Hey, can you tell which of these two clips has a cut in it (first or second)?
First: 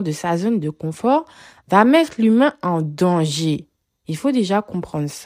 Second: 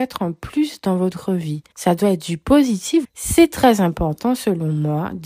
second